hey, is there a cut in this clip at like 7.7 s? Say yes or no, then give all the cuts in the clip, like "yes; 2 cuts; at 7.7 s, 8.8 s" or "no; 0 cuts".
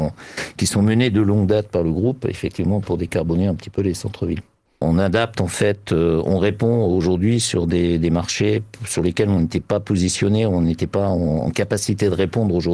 no; 1 cut; at 4.8 s